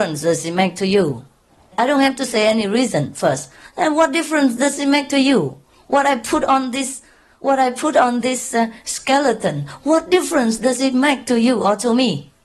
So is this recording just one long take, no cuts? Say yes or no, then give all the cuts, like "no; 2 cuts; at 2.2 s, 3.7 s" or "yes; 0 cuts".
yes; 0 cuts